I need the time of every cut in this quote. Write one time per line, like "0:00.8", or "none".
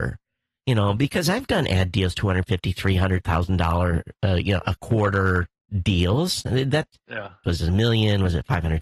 0:07.4